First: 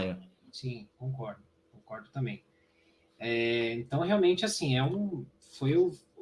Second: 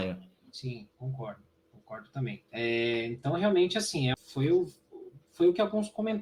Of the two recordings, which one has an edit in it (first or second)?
second